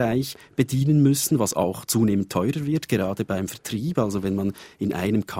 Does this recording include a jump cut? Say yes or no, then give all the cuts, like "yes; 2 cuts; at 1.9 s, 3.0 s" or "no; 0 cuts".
no; 0 cuts